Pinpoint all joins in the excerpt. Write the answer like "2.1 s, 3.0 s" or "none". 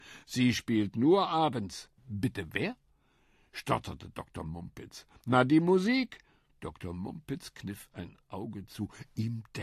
2.0 s, 6.5 s